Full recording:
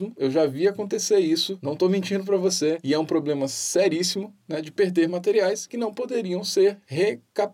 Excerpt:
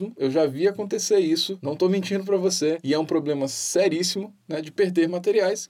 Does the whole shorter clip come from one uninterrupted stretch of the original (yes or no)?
yes